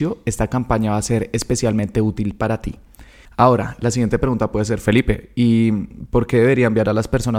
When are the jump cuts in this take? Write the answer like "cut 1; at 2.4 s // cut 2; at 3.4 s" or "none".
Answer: none